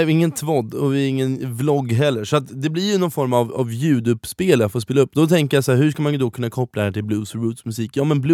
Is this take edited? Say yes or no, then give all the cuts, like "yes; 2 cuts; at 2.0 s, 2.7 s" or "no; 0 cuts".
no; 0 cuts